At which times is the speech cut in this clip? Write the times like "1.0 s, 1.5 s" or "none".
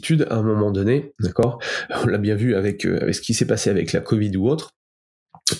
1.2 s